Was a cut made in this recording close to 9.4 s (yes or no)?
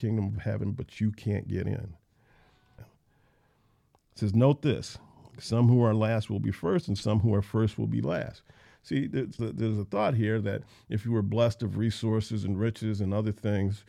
yes